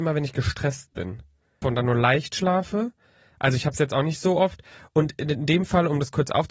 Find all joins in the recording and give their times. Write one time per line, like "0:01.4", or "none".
0:01.6